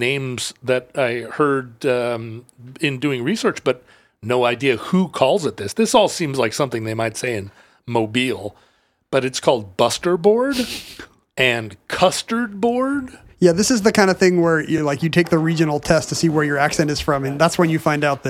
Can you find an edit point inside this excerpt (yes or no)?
no